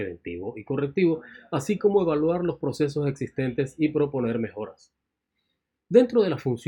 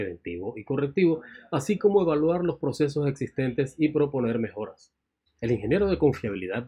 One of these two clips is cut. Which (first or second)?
second